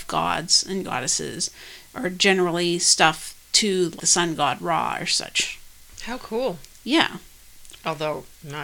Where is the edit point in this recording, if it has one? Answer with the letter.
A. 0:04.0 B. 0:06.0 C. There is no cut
A